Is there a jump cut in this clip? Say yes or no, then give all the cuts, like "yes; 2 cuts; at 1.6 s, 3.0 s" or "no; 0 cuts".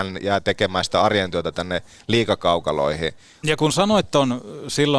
yes; 1 cut; at 3.4 s